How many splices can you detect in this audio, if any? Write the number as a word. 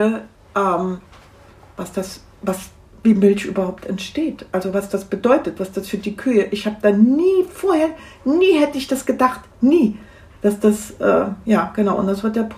zero